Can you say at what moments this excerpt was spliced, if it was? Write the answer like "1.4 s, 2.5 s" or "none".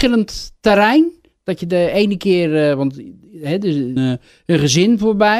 4.0 s